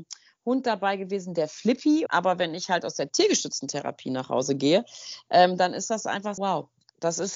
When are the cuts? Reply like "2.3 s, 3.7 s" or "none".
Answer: 2.1 s, 6.4 s